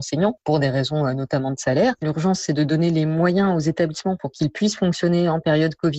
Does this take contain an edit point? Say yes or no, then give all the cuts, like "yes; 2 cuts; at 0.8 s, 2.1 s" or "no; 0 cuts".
no; 0 cuts